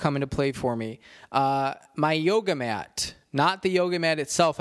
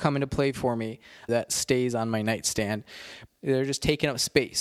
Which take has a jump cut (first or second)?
second